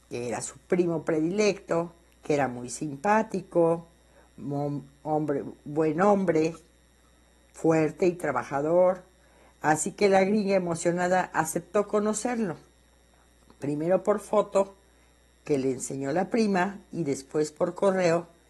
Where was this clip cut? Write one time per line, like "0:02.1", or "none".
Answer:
none